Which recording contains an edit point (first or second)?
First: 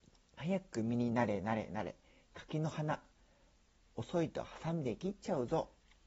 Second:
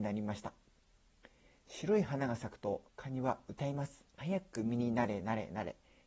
second